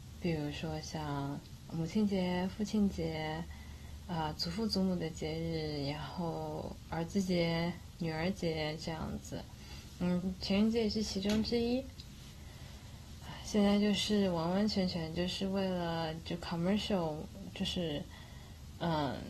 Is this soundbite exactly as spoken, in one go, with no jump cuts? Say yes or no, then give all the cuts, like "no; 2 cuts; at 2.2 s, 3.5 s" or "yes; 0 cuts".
yes; 0 cuts